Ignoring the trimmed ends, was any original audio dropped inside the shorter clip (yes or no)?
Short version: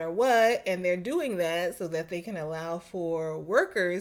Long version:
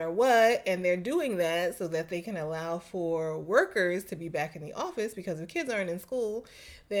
no